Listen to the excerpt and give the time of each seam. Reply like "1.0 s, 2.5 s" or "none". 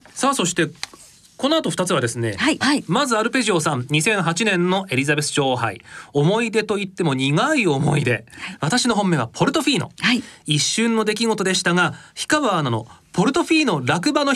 2.6 s